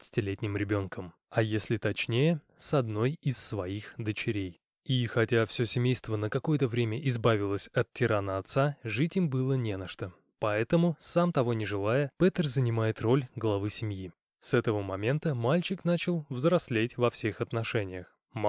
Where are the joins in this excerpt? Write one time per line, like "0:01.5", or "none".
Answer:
none